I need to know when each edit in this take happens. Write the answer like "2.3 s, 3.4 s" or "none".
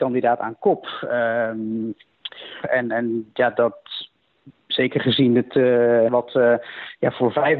2.6 s, 6.1 s

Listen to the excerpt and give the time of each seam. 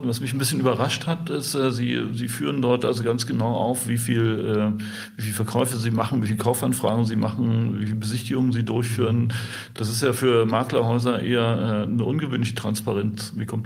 none

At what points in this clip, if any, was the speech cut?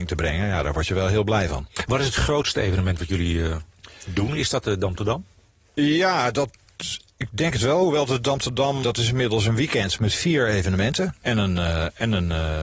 8.8 s, 11.2 s

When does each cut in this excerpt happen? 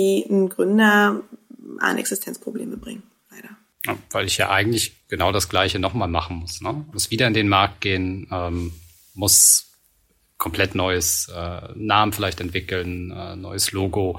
6.9 s

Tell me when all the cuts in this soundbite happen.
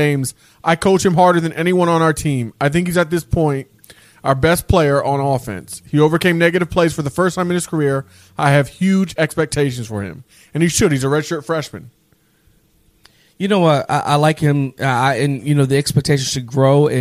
none

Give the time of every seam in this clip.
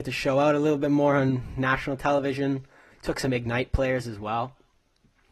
2.9 s

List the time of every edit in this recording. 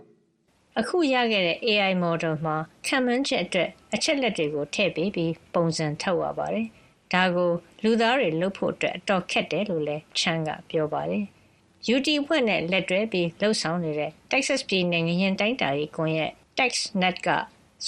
none

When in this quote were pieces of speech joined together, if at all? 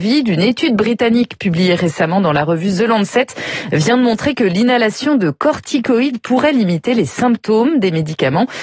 none

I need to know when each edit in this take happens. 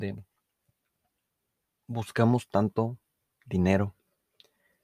none

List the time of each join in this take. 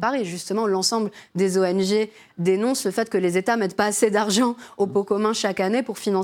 none

